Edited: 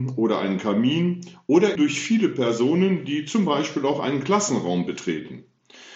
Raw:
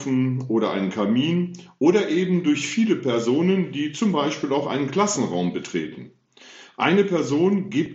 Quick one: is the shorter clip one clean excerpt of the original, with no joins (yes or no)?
no